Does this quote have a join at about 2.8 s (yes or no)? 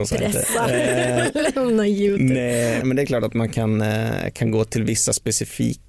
yes